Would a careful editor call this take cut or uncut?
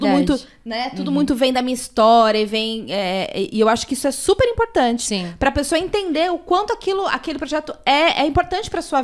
uncut